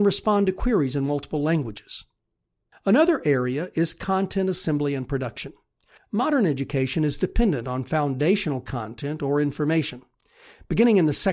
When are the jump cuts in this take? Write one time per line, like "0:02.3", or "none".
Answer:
none